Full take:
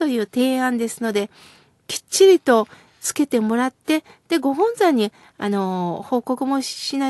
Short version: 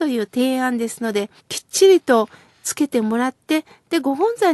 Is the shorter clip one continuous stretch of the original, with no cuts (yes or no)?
no